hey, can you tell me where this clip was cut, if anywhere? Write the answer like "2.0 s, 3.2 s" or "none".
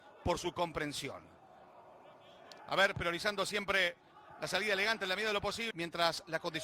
2.6 s, 5.7 s

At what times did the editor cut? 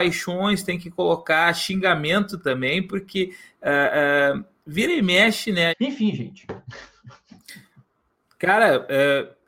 5.7 s

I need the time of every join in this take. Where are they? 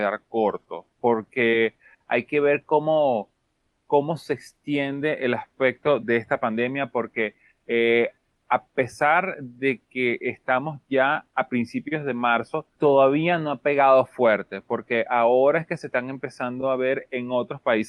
6.0 s, 12.7 s

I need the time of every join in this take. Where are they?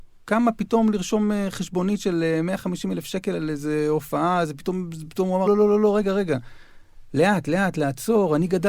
5.5 s

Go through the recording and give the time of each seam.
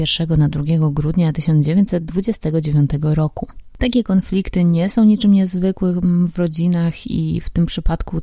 3.7 s

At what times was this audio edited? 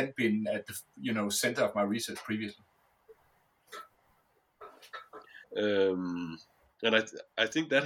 5.4 s

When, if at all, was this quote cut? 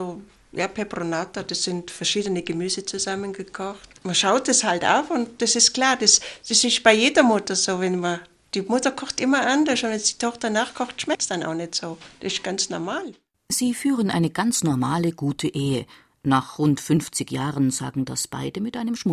4.0 s

